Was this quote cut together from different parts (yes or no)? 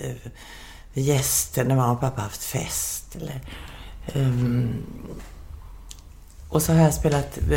no